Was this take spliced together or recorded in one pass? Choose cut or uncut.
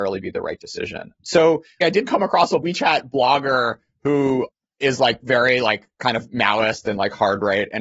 cut